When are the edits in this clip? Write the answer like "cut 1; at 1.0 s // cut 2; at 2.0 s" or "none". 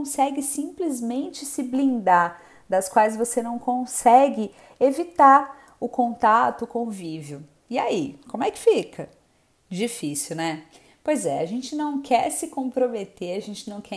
none